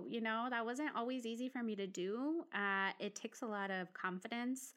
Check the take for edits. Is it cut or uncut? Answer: uncut